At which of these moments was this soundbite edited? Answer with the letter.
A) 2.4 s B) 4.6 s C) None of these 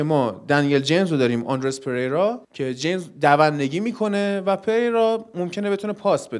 A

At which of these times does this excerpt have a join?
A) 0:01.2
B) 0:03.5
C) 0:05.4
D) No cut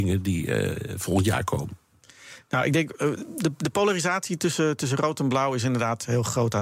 D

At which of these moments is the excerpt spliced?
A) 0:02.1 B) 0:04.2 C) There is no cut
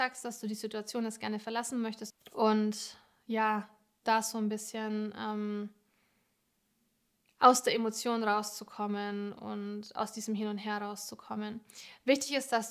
A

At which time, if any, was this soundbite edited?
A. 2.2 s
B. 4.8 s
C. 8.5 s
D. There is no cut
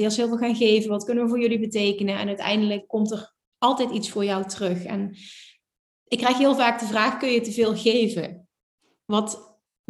D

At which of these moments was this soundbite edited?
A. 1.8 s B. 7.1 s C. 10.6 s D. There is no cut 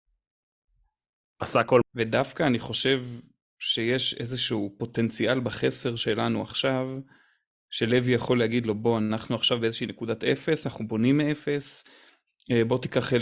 A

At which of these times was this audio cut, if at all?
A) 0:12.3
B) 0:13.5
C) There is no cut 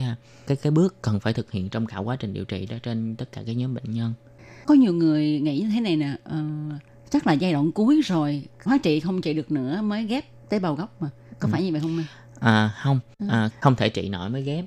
B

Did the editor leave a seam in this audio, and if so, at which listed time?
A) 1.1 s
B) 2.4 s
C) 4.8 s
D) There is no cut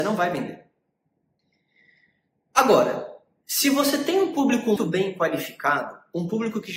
C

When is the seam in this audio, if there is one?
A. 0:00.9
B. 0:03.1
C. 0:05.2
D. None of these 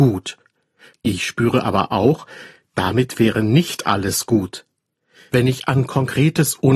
A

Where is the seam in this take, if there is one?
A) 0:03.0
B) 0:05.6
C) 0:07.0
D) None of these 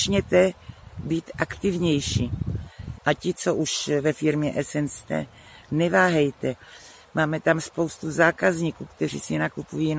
A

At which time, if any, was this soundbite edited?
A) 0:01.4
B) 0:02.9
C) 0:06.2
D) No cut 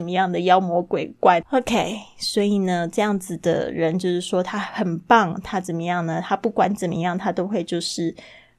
A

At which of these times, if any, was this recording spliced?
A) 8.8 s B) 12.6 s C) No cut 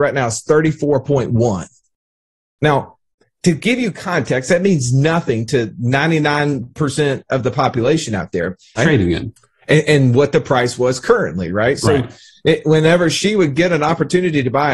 A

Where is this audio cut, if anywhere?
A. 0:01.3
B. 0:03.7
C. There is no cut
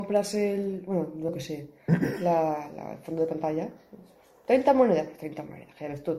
A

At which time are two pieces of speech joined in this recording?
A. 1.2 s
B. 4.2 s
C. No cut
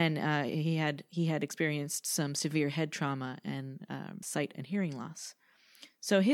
B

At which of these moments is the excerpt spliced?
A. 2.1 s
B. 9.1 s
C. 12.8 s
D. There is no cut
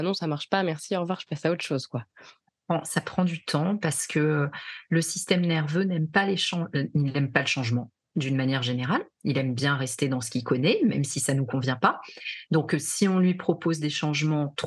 D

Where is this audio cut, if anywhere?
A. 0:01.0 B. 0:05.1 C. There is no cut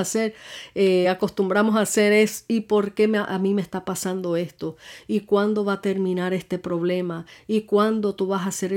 C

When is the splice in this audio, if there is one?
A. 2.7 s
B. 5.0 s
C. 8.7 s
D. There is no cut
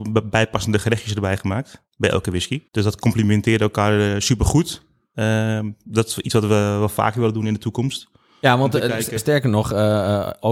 A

